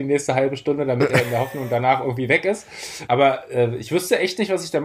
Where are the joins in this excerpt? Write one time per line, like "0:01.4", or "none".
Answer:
0:03.1

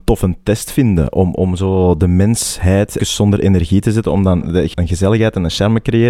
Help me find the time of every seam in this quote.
0:03.0
0:04.7

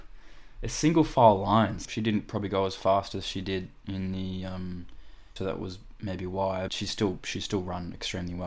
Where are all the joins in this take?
0:01.8
0:05.4
0:06.7

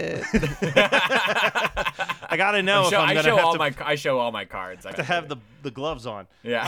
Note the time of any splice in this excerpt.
0:04.9

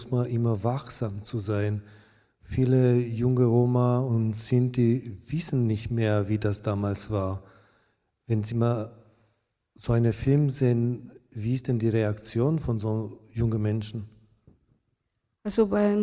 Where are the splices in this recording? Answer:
none

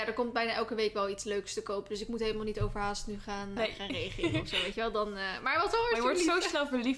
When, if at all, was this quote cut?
0:03.6

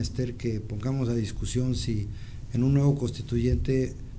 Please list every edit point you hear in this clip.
none

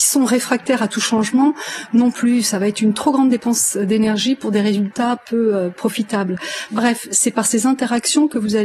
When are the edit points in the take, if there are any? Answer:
0:06.7

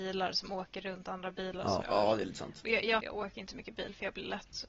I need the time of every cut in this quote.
0:01.8
0:03.0

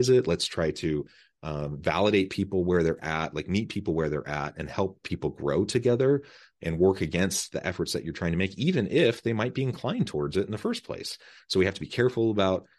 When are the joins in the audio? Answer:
0:06.5

